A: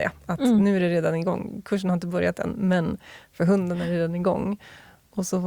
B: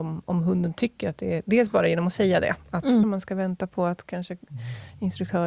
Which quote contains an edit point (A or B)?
B